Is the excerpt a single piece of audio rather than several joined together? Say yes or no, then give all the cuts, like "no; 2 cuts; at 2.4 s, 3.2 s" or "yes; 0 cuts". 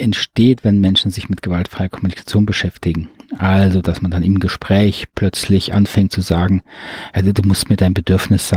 yes; 0 cuts